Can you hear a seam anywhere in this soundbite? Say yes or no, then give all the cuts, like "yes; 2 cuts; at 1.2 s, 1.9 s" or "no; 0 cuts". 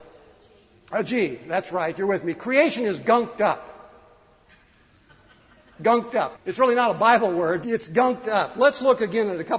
yes; 2 cuts; at 6.3 s, 7.6 s